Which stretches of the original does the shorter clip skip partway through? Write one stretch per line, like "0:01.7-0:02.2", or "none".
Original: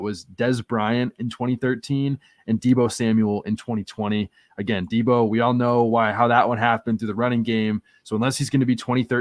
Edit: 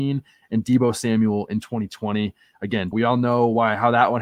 0:04.9-0:05.3